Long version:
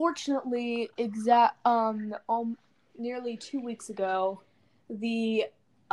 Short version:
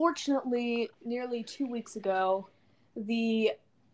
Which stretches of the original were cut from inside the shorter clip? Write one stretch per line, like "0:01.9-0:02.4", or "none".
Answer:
0:00.9-0:02.9